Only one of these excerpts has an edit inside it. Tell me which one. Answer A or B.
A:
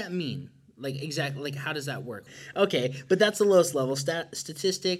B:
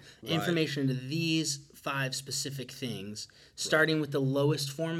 A